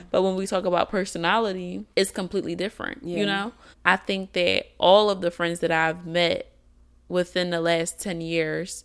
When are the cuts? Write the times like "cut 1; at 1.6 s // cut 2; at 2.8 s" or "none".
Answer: cut 1; at 1.9 s // cut 2; at 3.7 s